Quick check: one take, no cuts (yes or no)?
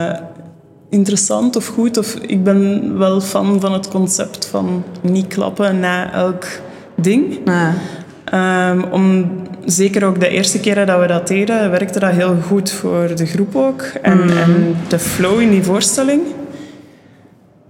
yes